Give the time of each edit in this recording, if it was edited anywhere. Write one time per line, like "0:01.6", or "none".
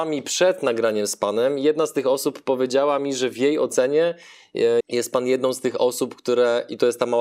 0:04.8